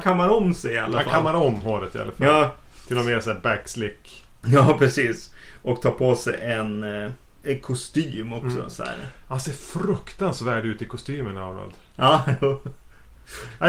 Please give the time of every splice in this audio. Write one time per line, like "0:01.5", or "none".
none